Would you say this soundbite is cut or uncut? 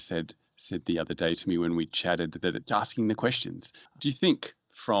cut